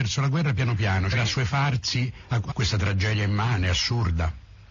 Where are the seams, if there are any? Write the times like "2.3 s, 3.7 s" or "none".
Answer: 1.1 s, 2.5 s